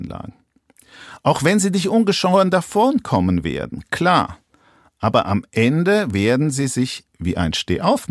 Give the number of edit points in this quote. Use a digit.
0